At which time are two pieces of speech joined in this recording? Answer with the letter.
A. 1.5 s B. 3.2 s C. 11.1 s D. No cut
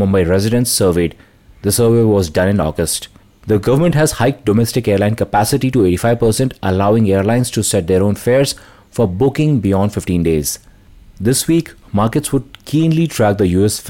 D